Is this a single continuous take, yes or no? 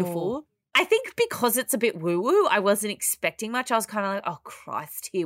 yes